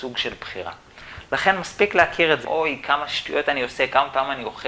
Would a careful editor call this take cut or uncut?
cut